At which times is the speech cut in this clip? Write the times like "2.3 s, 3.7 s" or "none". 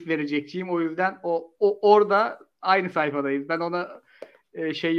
none